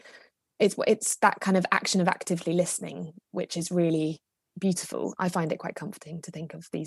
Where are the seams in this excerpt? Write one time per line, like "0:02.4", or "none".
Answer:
0:05.2